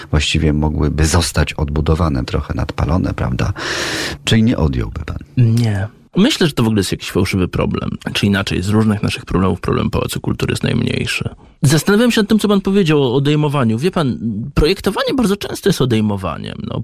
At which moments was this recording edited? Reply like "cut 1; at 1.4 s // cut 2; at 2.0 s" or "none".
cut 1; at 2.2 s // cut 2; at 4.2 s